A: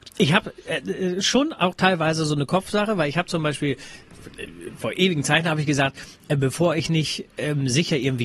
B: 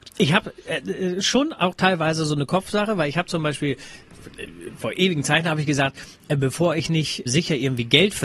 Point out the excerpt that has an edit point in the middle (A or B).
B